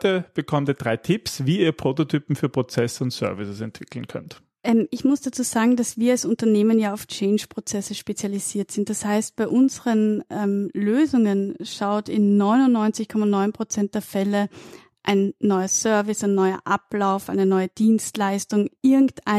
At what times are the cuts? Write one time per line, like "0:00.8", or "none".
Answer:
none